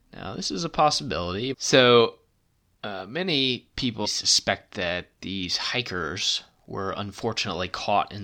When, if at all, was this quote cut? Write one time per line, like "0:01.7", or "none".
0:01.5
0:04.0